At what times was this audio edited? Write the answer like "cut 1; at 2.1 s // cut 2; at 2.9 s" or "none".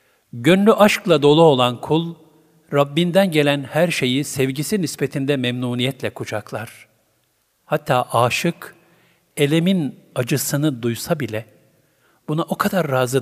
none